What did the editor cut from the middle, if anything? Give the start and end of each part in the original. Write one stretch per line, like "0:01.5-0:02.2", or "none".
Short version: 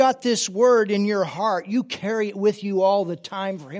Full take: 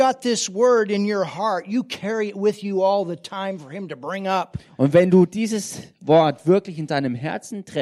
none